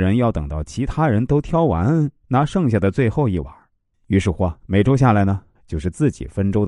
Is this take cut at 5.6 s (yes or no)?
yes